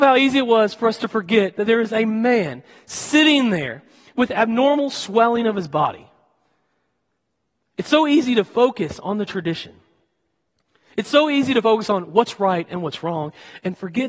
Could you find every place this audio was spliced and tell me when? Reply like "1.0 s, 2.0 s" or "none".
none

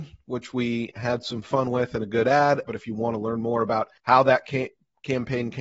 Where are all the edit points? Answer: 2.6 s, 4.0 s

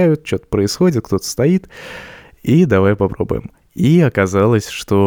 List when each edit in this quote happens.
3.6 s

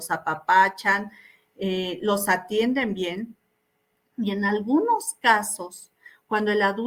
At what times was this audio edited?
none

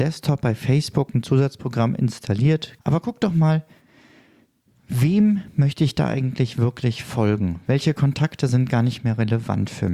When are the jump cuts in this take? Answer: 2.8 s

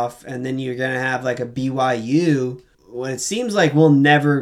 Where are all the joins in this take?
2.7 s

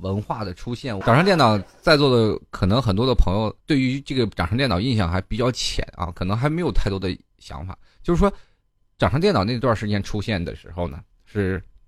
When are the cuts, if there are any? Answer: 1.0 s, 3.6 s

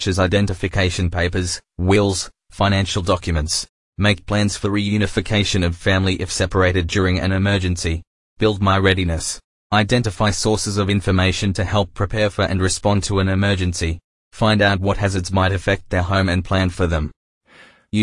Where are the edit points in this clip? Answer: none

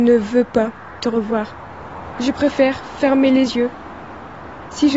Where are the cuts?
2.1 s

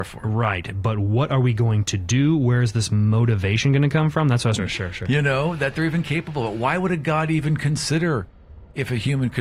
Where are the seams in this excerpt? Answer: 4.6 s

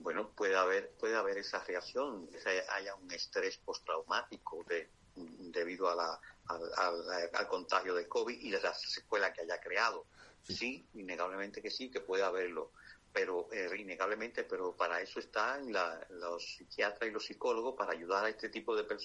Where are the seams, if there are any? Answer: none

